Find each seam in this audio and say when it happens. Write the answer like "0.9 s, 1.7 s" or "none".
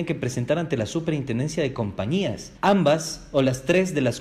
2.6 s

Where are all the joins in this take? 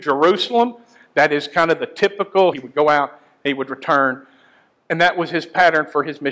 2.5 s

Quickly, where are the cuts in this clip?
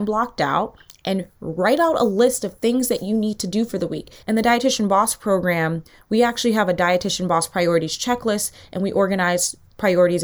4.2 s

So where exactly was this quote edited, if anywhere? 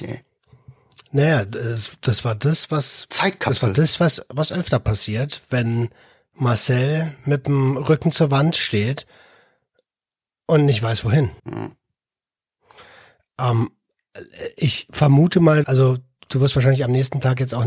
11.4 s, 15.6 s

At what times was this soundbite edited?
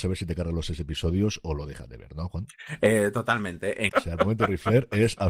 3.9 s

